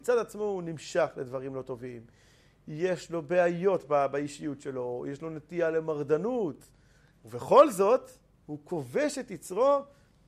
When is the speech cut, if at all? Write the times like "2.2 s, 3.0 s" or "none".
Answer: none

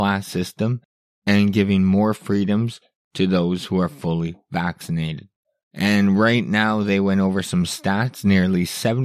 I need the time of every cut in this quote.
5.6 s

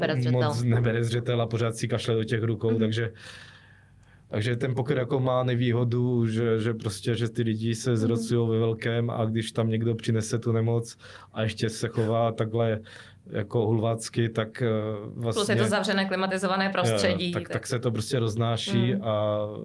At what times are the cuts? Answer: none

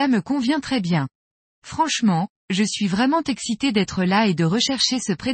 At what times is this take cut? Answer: none

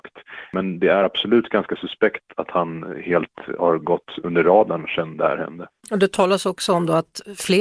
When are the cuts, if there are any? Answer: none

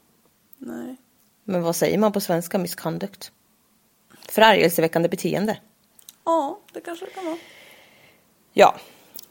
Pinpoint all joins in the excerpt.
none

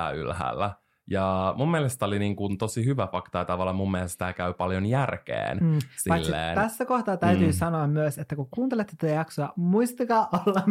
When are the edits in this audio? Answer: none

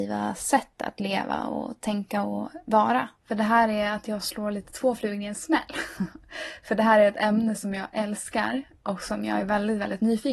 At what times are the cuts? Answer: 3.2 s

